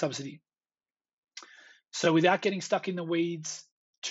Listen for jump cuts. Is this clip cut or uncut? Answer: uncut